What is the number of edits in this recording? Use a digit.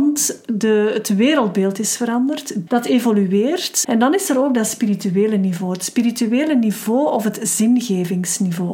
2